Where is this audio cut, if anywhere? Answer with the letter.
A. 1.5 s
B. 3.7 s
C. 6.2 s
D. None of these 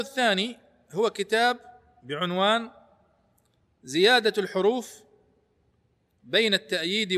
D